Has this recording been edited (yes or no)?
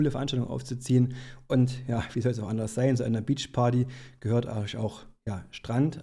no